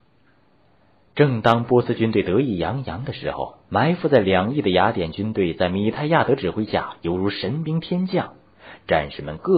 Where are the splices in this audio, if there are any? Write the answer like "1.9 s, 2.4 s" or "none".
3.6 s

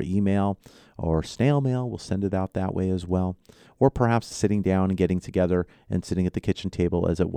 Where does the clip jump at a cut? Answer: 4.3 s

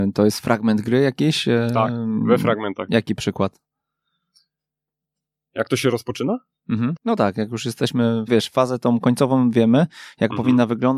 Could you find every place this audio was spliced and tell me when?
7.0 s, 8.3 s

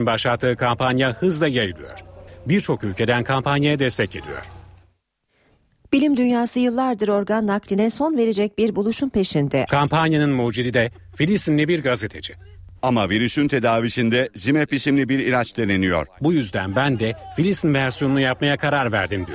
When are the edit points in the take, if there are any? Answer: 9.7 s, 12.7 s, 16.2 s

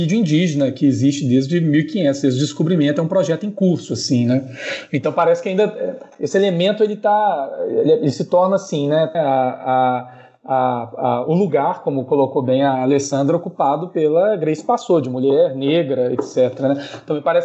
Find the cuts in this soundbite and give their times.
9.1 s

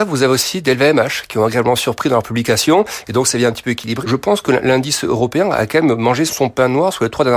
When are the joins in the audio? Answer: 4.0 s, 6.3 s

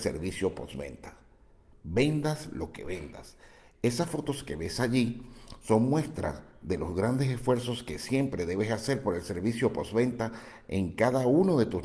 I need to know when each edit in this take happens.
1.7 s

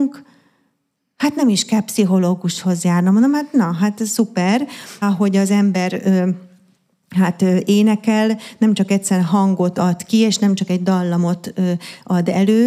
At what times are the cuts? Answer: 5.0 s

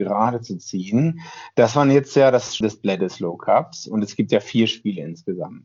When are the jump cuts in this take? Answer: 2.6 s

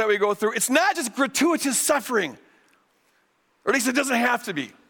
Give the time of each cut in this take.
none

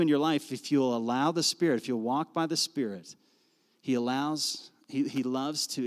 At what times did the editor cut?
none

